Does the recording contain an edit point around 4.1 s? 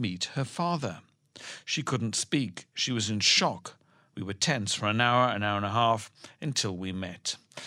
yes; 1 cut; at 4.1 s

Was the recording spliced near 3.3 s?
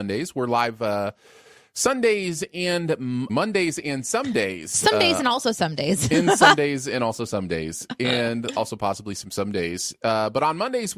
yes; 1 cut; at 3.3 s

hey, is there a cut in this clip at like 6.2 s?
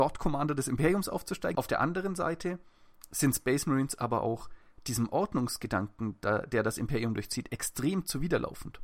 no; 1 cut; at 1.5 s

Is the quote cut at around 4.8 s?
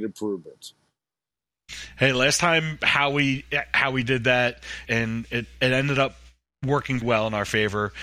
yes; 2 cuts; at 4.8 s, 7.0 s

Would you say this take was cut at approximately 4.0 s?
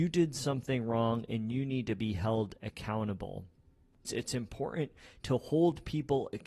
yes; 1 cut; at 4.0 s

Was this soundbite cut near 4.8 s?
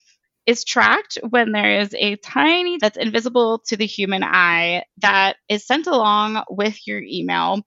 no; 1 cut; at 2.8 s

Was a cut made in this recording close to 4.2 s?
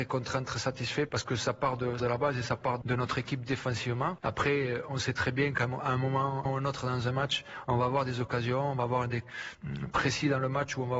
yes; 1 cut; at 4.2 s

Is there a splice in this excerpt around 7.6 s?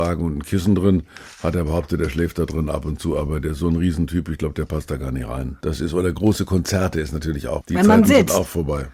yes; 2 cuts; at 5.6 s, 7.6 s

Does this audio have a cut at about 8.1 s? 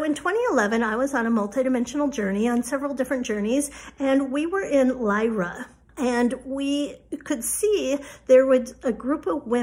no; 1 cut; at 5.9 s

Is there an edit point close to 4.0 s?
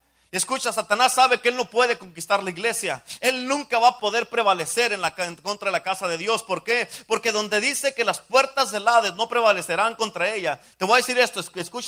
yes; 1 cut; at 4.0 s

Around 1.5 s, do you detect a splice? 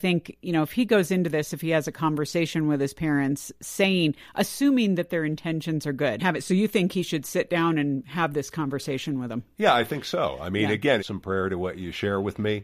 no; 2 cuts; at 6.2 s, 11.0 s

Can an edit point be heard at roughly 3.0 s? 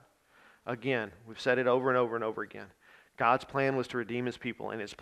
no; 0 cuts

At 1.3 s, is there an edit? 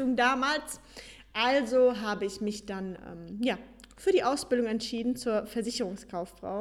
no; 0 cuts

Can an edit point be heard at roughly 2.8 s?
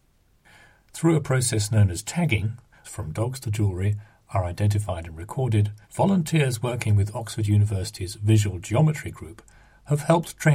yes; 2 cuts; at 2.8 s, 5.8 s

